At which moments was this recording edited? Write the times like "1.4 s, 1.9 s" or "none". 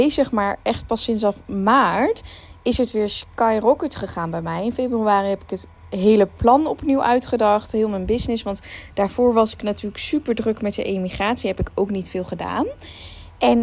5.8 s

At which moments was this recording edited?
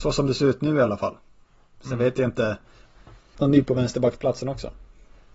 3.3 s

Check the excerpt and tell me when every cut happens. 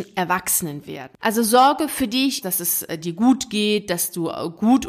1.2 s, 2.4 s

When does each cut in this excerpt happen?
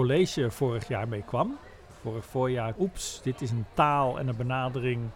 2.7 s

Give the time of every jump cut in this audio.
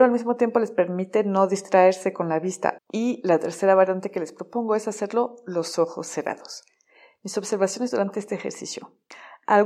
2.8 s

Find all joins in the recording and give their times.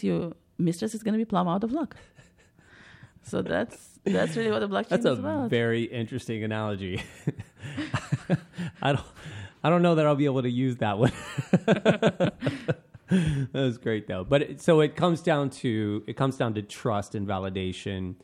none

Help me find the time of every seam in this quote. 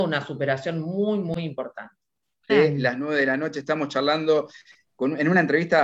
2.5 s

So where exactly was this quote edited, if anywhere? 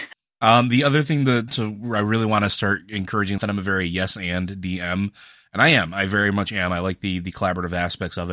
1.5 s, 3.4 s

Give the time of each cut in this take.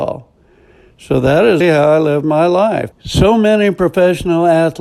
1.6 s, 2.9 s

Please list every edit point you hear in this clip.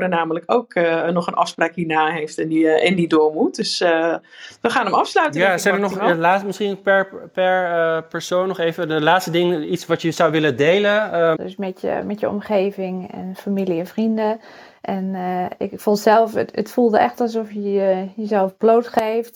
11.3 s

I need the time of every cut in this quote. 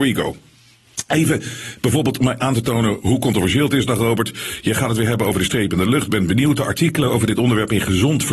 none

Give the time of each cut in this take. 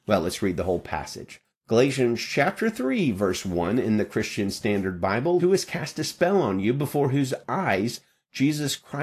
5.4 s

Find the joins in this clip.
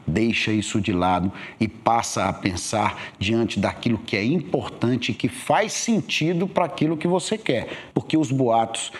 7.9 s

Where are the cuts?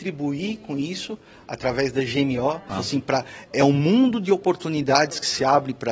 2.7 s

